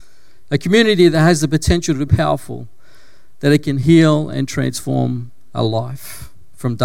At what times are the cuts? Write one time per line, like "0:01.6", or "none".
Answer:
0:02.1